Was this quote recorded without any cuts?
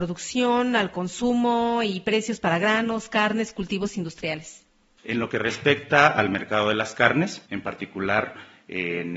yes; 0 cuts

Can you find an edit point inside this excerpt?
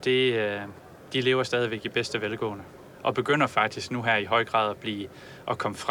no; 0 cuts

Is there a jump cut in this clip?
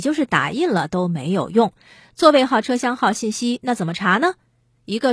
no; 0 cuts

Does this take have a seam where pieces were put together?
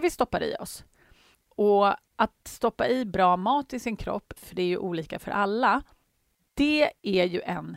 yes; 2 cuts; at 1.3 s, 4.4 s

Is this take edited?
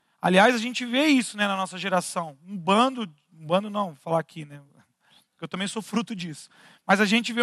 no; 0 cuts

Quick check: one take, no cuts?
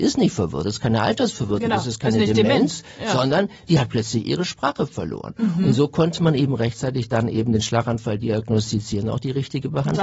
yes; 0 cuts

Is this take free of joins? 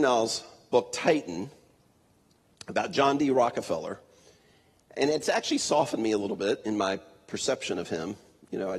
yes; 0 cuts

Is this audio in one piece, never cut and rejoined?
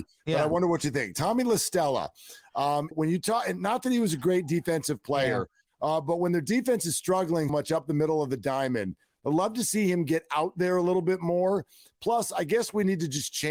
no; 2 cuts; at 2.9 s, 7.5 s

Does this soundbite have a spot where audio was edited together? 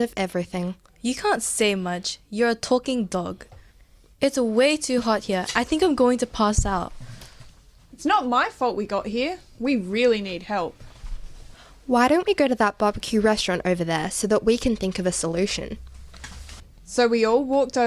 no; 0 cuts

